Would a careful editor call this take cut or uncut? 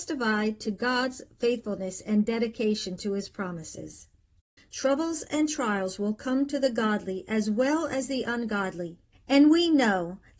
cut